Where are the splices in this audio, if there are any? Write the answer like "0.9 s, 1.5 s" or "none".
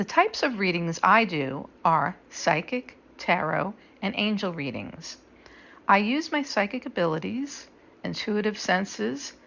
none